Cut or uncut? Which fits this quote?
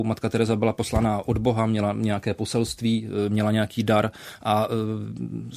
uncut